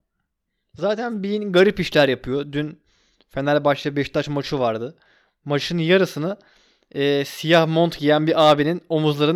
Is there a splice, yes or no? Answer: no